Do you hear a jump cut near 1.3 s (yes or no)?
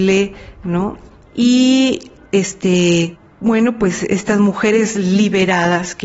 yes